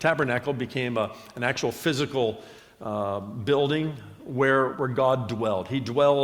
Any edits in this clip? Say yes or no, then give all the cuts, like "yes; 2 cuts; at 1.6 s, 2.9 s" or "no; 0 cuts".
yes; 1 cut; at 4.7 s